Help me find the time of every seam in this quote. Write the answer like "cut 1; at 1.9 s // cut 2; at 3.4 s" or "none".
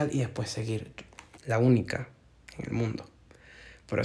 cut 1; at 1.4 s